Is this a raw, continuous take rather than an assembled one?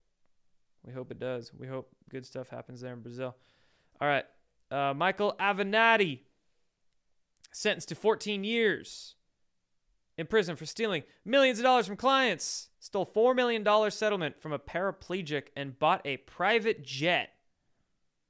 no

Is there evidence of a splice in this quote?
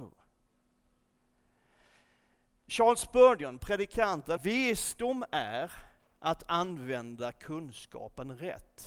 yes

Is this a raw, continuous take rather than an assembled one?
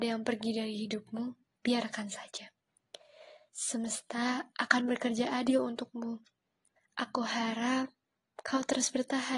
no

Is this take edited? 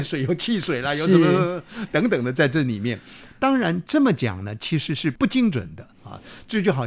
no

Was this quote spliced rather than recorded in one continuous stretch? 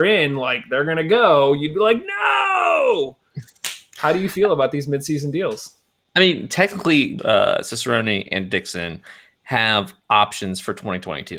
yes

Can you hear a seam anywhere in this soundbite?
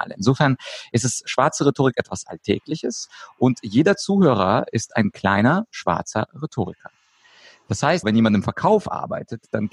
yes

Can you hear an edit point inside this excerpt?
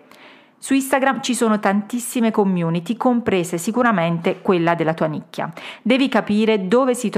no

